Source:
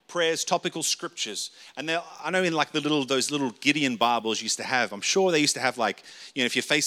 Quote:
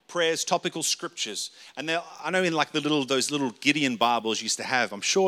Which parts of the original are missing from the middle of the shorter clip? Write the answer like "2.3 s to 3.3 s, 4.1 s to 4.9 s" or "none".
none